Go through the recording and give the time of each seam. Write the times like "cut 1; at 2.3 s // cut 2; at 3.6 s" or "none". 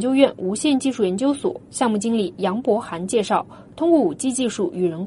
none